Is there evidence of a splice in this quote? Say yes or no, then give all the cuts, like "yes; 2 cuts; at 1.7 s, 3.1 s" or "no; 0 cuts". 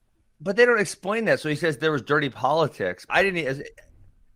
yes; 1 cut; at 3.1 s